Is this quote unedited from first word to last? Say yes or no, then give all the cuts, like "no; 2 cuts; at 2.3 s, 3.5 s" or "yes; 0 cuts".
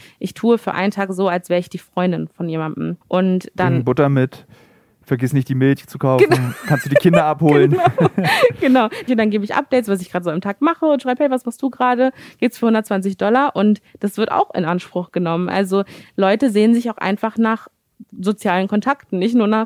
no; 2 cuts; at 3.0 s, 9.1 s